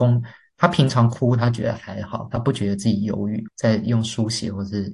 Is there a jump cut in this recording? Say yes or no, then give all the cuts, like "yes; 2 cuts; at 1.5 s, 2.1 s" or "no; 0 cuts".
yes; 1 cut; at 3.5 s